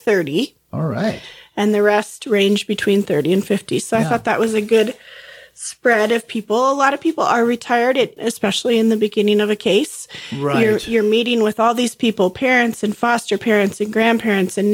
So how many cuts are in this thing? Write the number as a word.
one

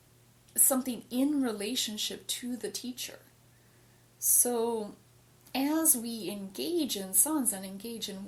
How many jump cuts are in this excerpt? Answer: zero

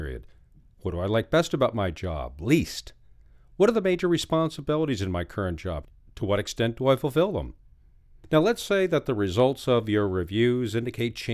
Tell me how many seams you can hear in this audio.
zero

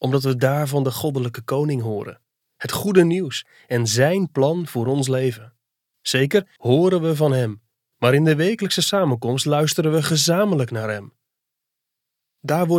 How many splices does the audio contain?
one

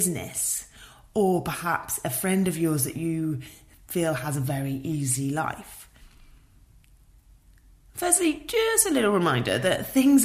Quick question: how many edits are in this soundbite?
zero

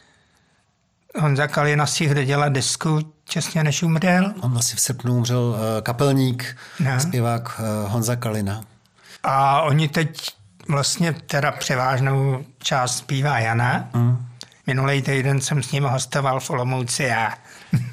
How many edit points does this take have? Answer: one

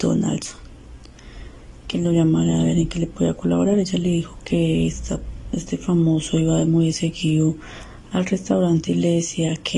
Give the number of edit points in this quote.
zero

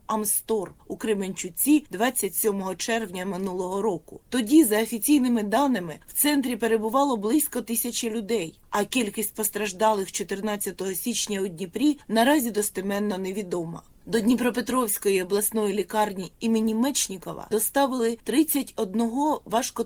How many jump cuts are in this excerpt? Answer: one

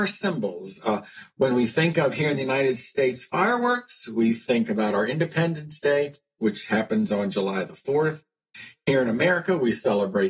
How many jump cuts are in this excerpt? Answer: zero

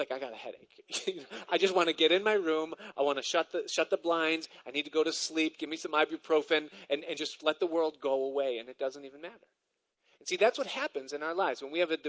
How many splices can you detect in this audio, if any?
zero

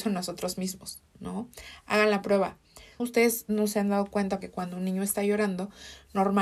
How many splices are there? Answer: two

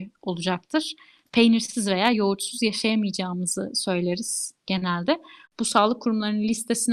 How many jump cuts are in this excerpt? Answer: one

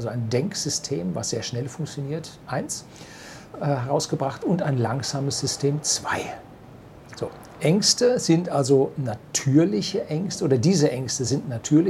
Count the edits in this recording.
one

